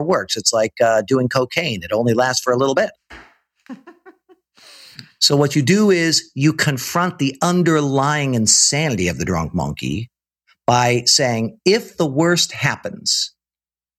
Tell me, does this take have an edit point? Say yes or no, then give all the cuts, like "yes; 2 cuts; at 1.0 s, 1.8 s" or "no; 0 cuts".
no; 0 cuts